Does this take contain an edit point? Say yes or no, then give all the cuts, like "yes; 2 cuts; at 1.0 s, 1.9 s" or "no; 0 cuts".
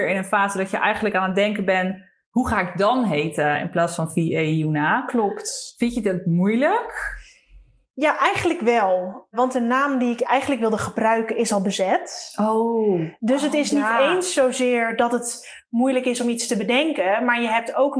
no; 0 cuts